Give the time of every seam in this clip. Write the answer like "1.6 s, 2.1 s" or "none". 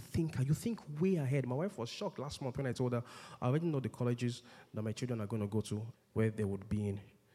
5.9 s

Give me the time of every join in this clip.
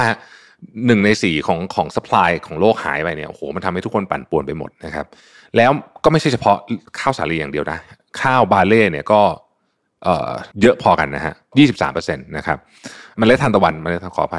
10.5 s

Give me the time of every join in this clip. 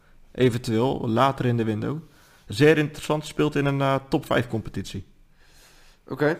none

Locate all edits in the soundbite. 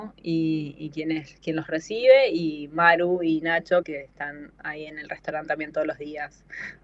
3.8 s

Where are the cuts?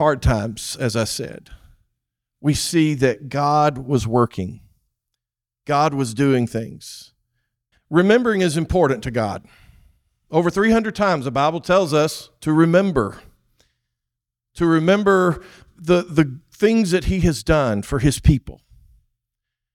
7.7 s

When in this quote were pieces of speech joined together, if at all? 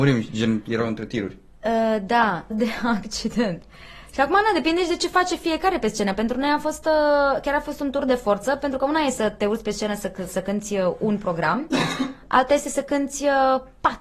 2.5 s

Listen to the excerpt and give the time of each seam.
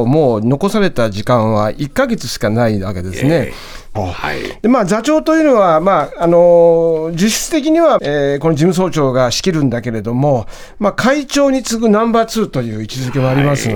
4.0 s, 8.0 s

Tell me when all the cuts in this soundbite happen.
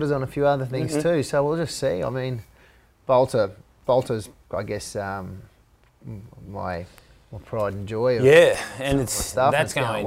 none

